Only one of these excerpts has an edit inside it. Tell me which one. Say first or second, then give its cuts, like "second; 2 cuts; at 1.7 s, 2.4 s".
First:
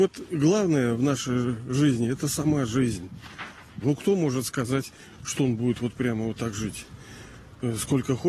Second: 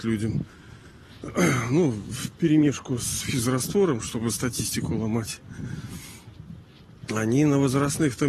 first; 2 cuts; at 3.8 s, 5.3 s